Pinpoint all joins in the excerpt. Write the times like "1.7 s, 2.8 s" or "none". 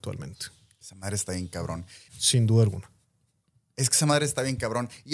2.1 s